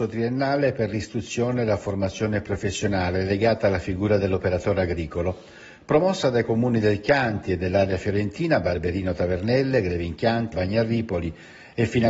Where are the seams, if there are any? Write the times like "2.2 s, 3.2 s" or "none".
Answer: 10.5 s